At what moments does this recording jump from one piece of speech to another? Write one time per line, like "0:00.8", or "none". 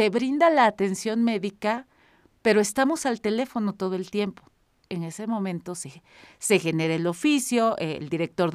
0:04.9